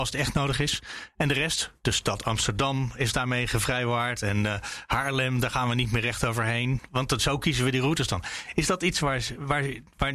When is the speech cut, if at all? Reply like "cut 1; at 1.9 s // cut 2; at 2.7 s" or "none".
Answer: none

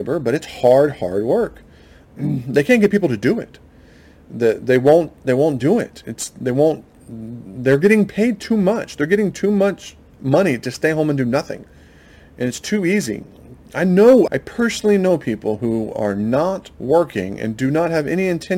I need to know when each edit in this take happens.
cut 1; at 14.3 s // cut 2; at 16.7 s

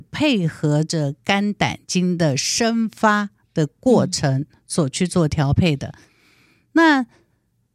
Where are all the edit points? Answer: none

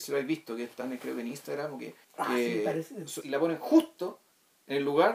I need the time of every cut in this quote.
cut 1; at 2.0 s // cut 2; at 3.2 s

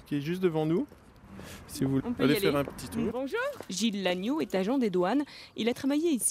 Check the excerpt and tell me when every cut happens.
cut 1; at 2.0 s // cut 2; at 3.1 s

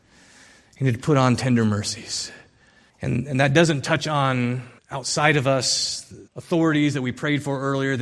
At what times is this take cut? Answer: cut 1; at 2.9 s // cut 2; at 4.8 s // cut 3; at 6.3 s

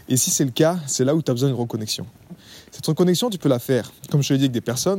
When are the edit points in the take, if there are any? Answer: cut 1; at 4.0 s

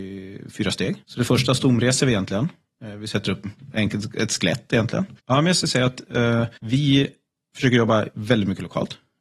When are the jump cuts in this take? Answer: cut 1; at 1.0 s // cut 2; at 5.2 s // cut 3; at 6.6 s

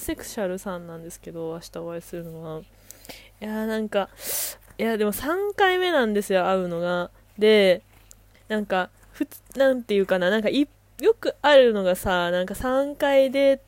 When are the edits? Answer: none

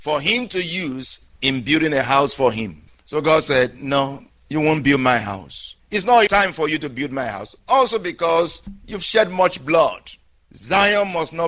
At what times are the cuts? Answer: cut 1; at 6.3 s

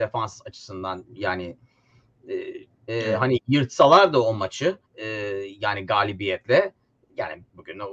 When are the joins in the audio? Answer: cut 1; at 2.9 s // cut 2; at 4.8 s

